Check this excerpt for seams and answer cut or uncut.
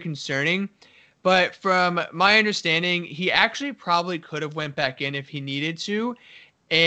uncut